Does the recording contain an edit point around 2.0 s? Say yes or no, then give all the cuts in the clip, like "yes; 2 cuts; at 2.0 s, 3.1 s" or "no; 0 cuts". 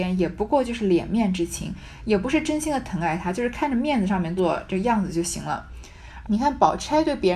no; 2 cuts; at 4.4 s, 6.2 s